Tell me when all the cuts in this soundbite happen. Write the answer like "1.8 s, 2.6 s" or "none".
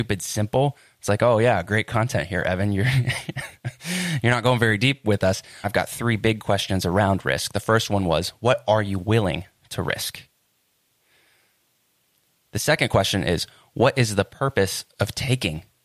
5.6 s

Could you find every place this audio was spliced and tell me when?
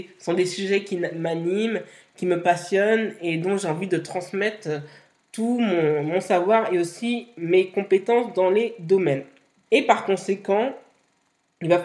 9.6 s

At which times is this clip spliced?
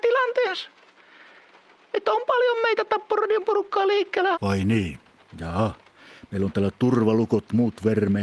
4.3 s

